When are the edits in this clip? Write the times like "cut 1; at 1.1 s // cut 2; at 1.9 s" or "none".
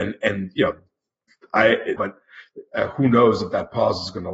cut 1; at 2.0 s